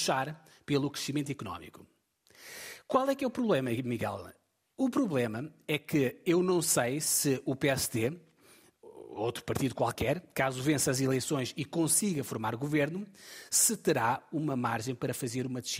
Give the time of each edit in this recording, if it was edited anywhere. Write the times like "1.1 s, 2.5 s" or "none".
none